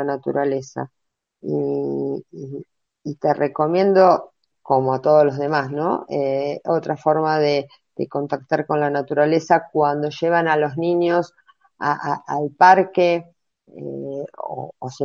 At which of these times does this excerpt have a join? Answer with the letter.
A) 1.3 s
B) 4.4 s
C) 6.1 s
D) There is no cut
D